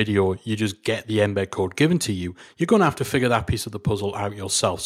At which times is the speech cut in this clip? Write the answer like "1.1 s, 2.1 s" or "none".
none